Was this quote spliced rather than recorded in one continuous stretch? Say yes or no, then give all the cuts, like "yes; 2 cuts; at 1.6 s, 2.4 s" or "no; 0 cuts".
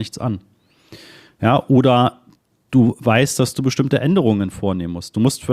no; 0 cuts